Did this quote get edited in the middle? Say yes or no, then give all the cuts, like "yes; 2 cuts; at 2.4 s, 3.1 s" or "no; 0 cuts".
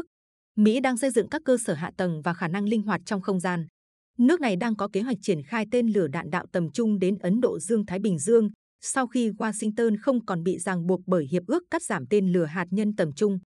no; 0 cuts